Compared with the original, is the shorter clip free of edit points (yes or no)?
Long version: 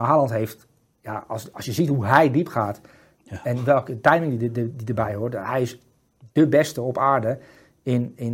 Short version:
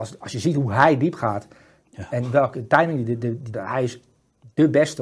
no